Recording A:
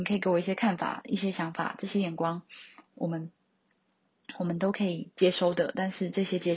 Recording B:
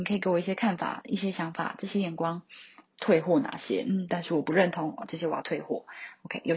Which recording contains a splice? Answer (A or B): B